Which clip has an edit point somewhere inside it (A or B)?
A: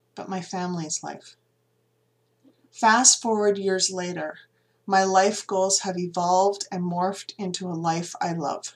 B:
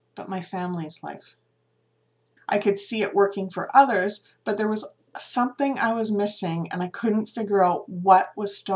B